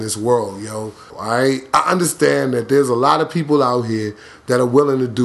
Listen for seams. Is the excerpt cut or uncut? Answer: cut